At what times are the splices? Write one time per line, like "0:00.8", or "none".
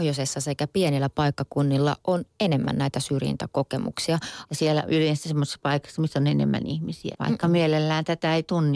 0:04.5
0:07.1